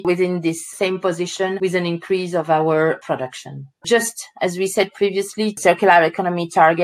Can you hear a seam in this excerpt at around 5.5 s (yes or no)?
yes